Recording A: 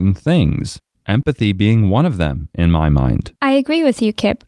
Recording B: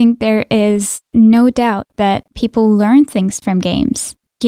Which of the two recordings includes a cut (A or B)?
A